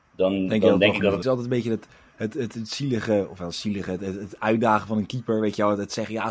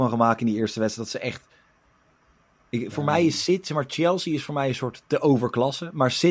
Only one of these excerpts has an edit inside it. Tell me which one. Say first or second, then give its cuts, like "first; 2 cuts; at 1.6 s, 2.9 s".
first; 1 cut; at 1.2 s